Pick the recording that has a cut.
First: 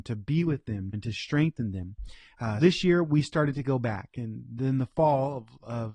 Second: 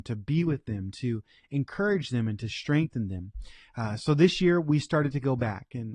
first; 2 cuts; at 0.9 s, 2.6 s

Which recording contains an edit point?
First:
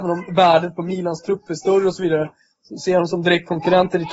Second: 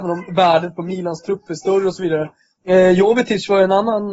second; 1 cut; at 2.6 s

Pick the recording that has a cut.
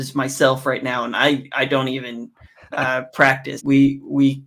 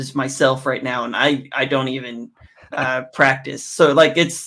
first; 1 cut; at 3.6 s

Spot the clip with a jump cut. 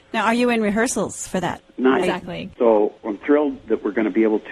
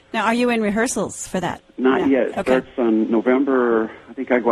first; 1 cut; at 2.0 s

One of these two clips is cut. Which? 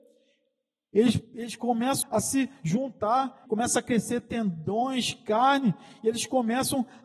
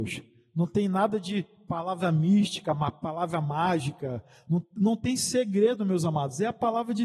first; 2 cuts; at 2.0 s, 3.5 s

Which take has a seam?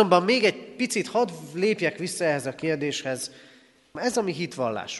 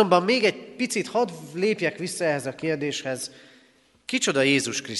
first; 1 cut; at 4.0 s

